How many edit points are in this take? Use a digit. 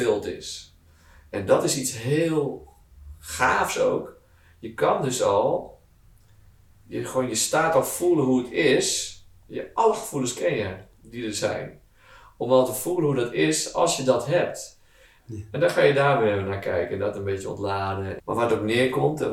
2